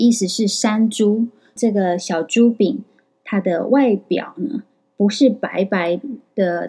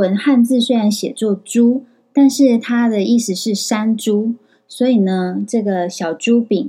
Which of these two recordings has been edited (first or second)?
first